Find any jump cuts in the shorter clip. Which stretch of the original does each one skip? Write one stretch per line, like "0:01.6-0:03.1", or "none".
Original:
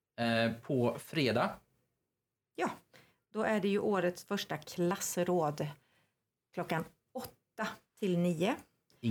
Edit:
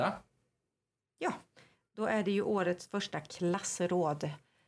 none